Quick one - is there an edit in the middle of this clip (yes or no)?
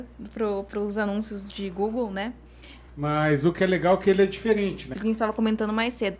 yes